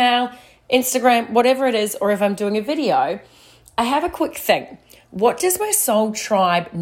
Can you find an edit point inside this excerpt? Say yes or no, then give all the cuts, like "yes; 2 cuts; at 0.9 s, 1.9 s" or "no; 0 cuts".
no; 0 cuts